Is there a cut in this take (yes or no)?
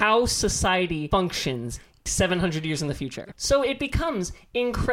no